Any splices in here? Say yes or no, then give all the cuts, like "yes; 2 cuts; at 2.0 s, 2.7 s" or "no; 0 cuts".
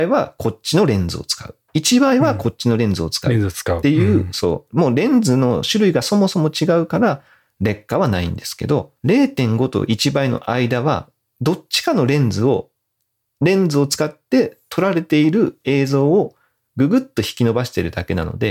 yes; 1 cut; at 9.0 s